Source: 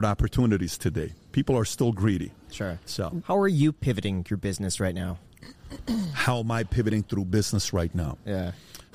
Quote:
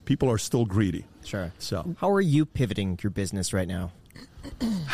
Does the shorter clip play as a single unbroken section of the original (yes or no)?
yes